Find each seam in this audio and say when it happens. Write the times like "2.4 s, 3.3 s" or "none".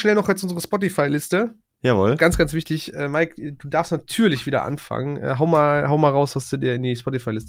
none